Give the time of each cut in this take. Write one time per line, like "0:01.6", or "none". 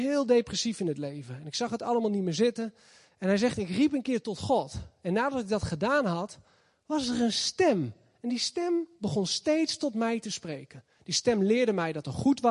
none